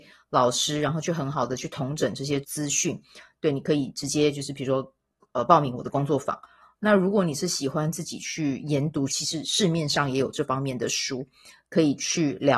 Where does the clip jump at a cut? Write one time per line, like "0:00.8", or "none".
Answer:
0:02.4
0:09.1